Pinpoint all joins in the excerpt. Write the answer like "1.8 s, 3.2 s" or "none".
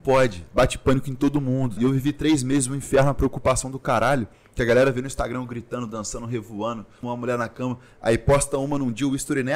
1.8 s, 7.0 s